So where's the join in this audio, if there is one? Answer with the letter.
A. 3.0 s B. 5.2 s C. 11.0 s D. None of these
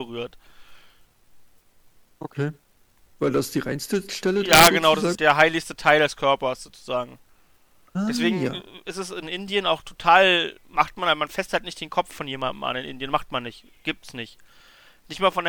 B